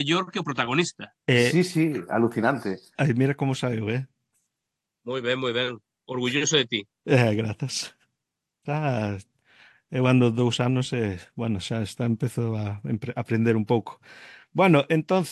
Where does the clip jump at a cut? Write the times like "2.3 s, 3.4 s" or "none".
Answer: none